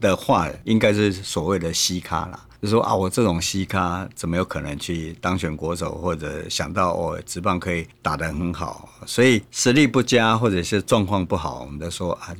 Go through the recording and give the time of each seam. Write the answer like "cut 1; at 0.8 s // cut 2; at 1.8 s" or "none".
none

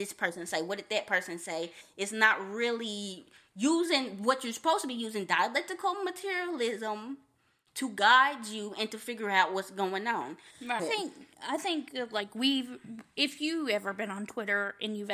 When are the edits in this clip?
cut 1; at 10.8 s

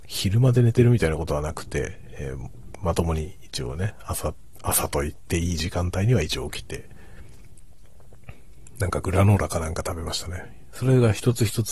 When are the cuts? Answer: cut 1; at 10.7 s

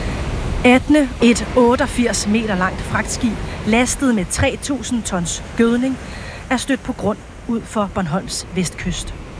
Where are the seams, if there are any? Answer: cut 1; at 1.2 s

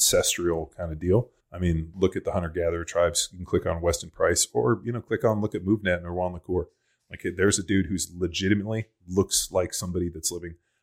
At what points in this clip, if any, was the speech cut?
cut 1; at 1.4 s

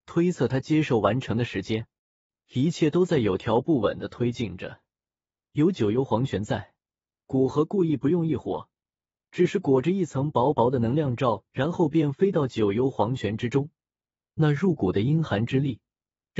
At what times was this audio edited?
none

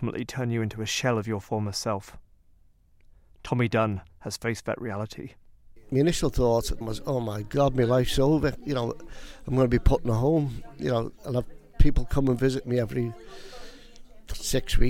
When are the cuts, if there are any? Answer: none

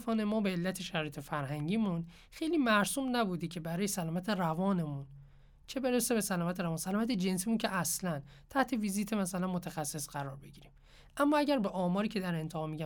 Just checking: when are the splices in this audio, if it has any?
none

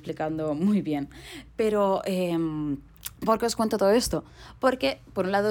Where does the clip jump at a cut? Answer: none

